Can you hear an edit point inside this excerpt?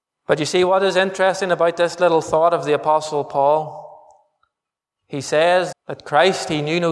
yes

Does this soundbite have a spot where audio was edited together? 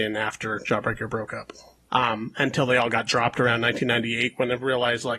yes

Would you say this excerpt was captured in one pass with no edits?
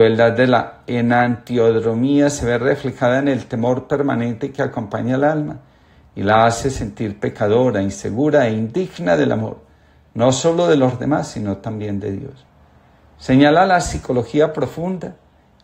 yes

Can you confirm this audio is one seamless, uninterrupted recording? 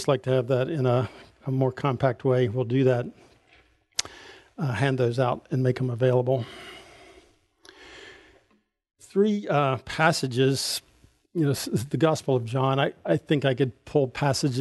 yes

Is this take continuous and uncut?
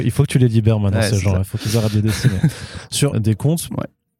no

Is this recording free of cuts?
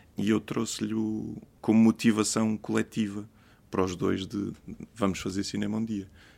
yes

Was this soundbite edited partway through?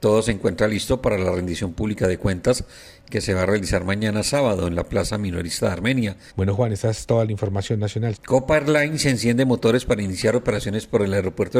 yes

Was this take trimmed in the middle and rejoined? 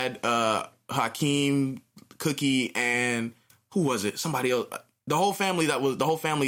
no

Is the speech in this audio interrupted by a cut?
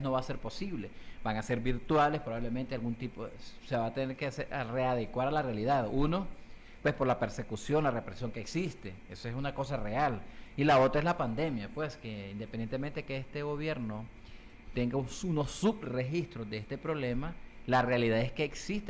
no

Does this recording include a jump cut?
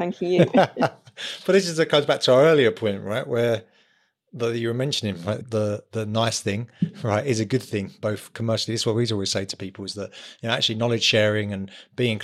yes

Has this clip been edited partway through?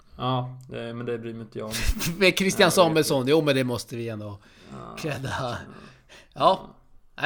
no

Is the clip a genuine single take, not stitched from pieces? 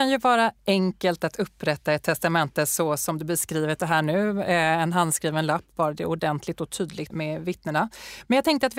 no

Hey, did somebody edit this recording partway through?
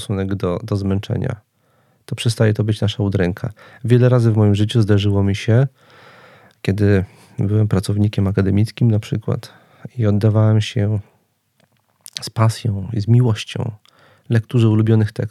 no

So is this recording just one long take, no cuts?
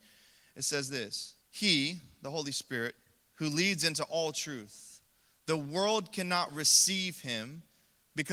no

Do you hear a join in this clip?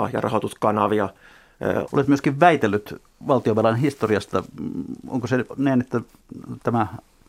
yes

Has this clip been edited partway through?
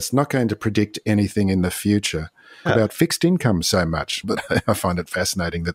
yes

